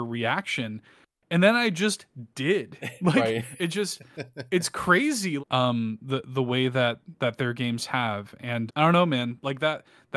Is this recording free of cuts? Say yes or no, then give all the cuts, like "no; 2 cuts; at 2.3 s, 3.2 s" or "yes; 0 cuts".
no; 2 cuts; at 5.4 s, 8.7 s